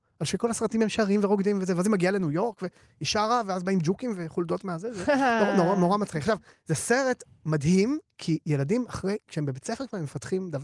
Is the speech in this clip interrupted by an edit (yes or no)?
no